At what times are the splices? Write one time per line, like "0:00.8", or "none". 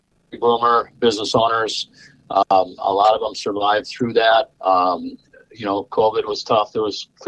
0:04.6

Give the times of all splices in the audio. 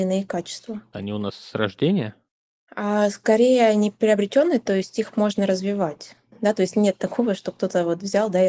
0:00.9

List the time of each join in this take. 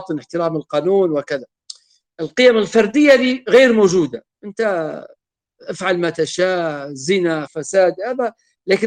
0:02.1
0:07.5

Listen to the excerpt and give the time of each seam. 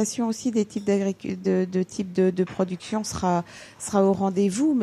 none

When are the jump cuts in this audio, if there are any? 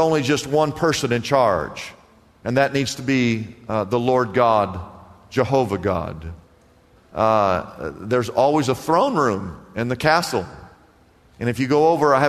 0:07.0

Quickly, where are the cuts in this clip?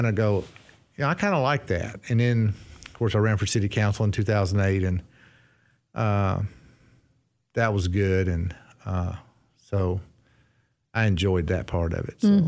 none

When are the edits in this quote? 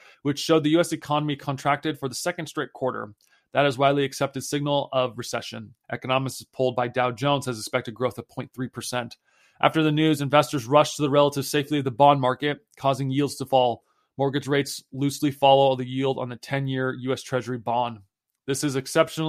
0:05.8

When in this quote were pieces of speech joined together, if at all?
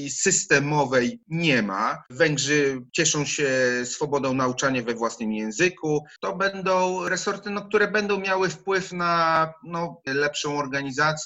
0:06.2
0:10.1

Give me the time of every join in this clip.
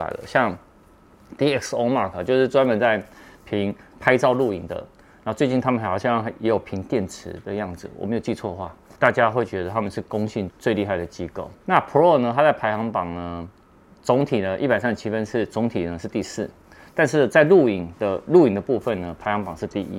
0:08.9
0:10.5
0:11.6

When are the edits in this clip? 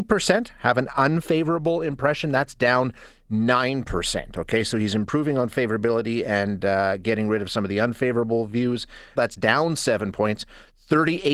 0:09.2

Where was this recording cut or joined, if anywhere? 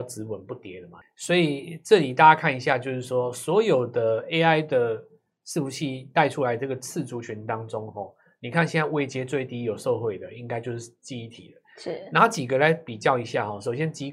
0:01.0

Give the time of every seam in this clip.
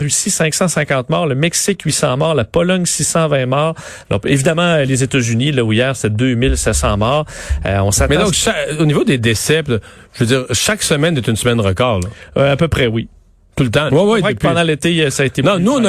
0:13.9

